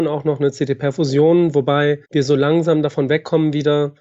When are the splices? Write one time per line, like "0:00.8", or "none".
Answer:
0:02.0